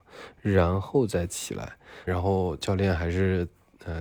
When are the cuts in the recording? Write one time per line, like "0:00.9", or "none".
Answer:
0:02.1